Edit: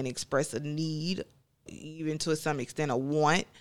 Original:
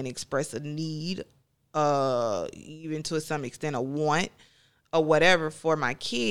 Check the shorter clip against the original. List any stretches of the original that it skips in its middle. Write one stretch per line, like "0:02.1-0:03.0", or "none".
0:01.7-0:02.5